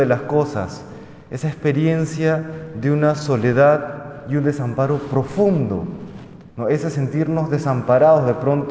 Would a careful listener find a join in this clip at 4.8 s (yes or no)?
no